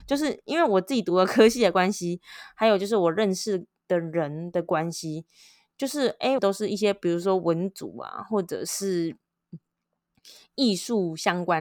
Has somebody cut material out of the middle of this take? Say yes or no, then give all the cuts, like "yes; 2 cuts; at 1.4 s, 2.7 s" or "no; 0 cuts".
yes; 1 cut; at 6.4 s